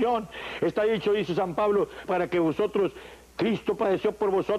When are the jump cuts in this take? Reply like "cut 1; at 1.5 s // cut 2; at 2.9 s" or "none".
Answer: cut 1; at 2.1 s